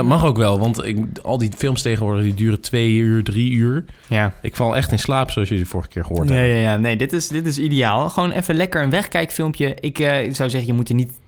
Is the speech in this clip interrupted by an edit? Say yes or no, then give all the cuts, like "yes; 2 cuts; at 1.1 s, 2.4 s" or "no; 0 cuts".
no; 0 cuts